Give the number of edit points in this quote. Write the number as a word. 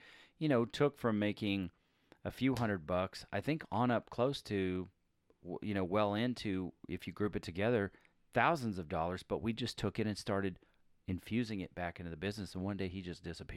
zero